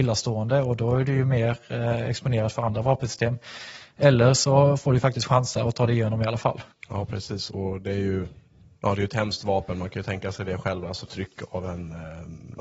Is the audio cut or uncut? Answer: cut